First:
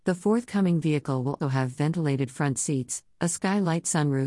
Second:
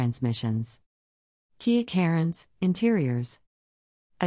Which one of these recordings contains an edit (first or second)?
first